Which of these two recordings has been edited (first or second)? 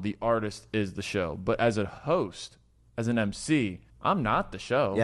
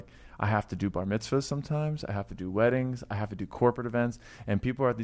first